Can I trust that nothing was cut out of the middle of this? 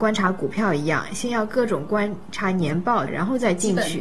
no; 1 cut; at 3.1 s

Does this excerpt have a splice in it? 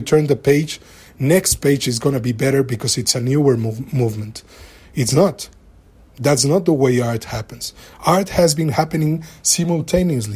no; 0 cuts

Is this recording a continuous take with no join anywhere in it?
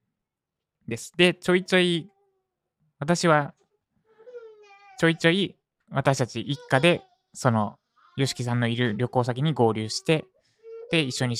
yes; 0 cuts

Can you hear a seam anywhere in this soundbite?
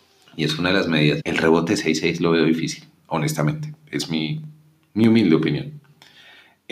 yes; 1 cut; at 1.2 s

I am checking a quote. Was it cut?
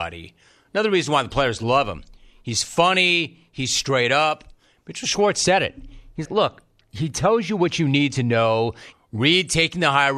yes; 2 cuts; at 6.3 s, 8.9 s

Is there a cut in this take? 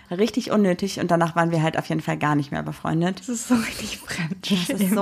no; 0 cuts

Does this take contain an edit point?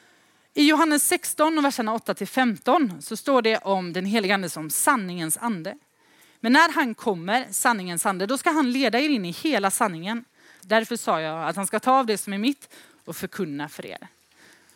yes; 1 cut; at 10.6 s

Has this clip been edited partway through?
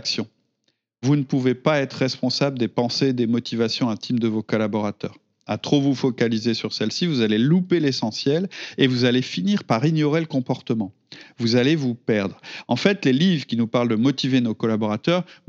no; 0 cuts

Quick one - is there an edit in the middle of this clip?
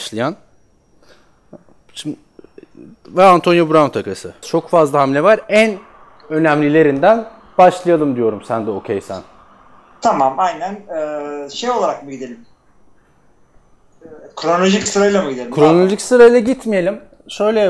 yes; 1 cut; at 4.4 s

